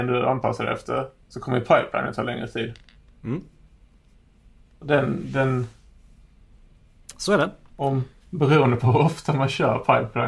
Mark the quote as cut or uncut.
cut